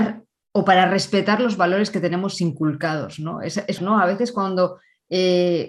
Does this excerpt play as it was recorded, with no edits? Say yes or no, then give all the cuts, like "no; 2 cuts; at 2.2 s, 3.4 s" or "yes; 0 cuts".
no; 1 cut; at 3.8 s